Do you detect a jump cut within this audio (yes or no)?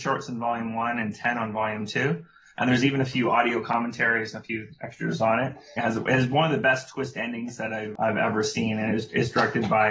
yes